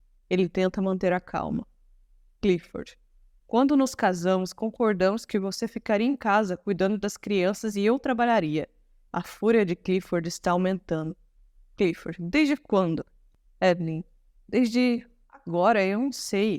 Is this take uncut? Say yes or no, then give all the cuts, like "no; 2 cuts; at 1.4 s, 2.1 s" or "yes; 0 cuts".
no; 1 cut; at 9.1 s